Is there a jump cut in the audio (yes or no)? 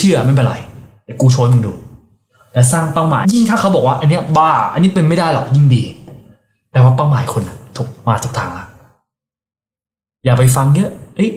yes